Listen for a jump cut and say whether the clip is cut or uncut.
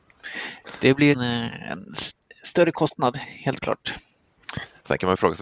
cut